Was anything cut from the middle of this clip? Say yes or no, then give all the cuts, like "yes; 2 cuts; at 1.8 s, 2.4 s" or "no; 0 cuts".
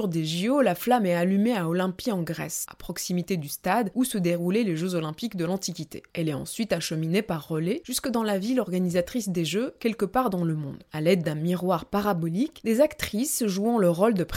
yes; 2 cuts; at 2.7 s, 10.9 s